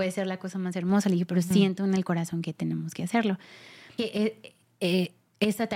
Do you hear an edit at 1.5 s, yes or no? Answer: no